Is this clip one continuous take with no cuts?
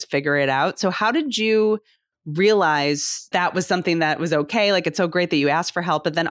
no; 1 cut; at 3.3 s

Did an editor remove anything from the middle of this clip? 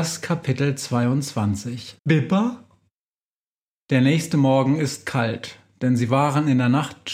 yes; 1 cut; at 2.0 s

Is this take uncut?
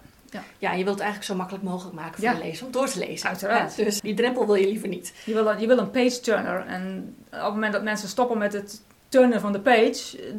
no; 1 cut; at 4.0 s

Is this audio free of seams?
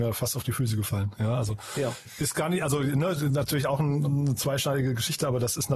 yes; 0 cuts

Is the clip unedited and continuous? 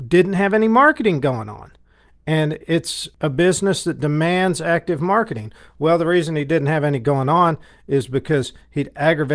yes; 0 cuts

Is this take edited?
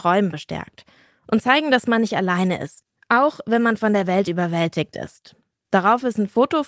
yes; 1 cut; at 5.5 s

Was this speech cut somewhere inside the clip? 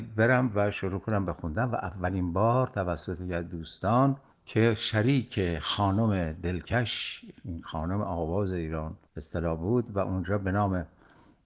yes; 1 cut; at 9.1 s

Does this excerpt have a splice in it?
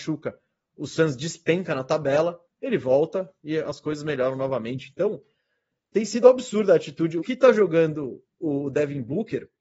yes; 1 cut; at 7.2 s

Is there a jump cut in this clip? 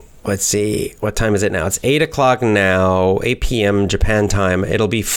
no; 0 cuts

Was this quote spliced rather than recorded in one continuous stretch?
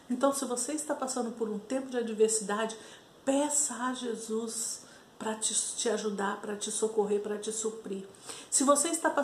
no; 0 cuts

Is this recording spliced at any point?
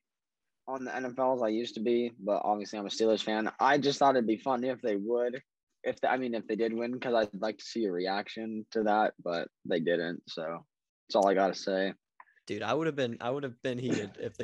no; 0 cuts

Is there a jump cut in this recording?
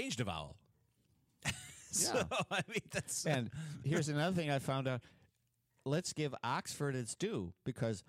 no; 0 cuts

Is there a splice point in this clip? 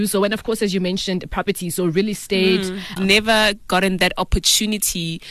yes; 1 cut; at 3.0 s

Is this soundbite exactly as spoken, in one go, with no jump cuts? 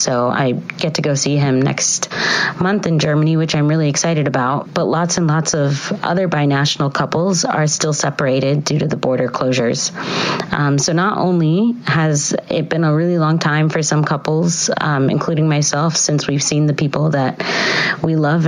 yes; 0 cuts

